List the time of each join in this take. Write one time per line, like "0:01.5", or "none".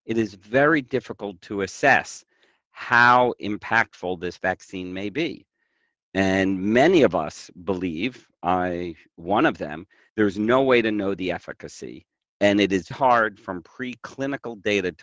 0:10.1
0:12.9